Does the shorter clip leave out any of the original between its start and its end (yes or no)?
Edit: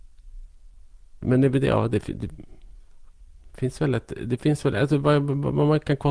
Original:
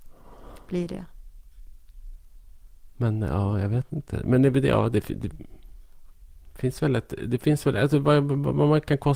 yes